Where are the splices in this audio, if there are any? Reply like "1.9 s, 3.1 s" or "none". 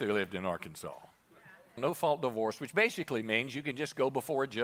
1.8 s